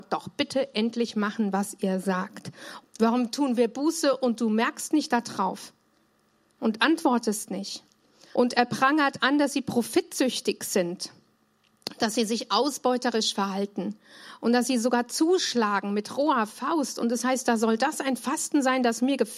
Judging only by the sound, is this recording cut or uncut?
cut